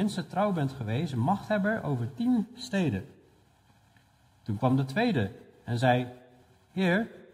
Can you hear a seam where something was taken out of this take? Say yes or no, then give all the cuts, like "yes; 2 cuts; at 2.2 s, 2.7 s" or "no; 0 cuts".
no; 0 cuts